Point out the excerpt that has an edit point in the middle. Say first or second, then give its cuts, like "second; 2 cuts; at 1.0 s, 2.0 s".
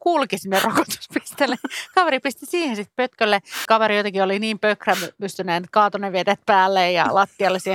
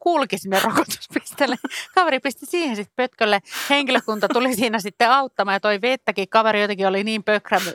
first; 1 cut; at 3.7 s